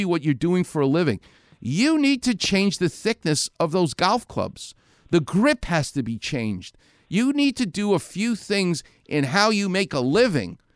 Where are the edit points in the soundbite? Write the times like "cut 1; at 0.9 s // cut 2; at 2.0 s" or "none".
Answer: none